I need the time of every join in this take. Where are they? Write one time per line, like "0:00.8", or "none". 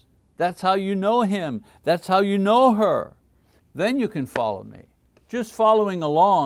0:03.6